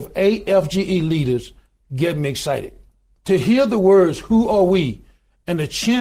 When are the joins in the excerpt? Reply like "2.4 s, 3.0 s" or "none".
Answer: none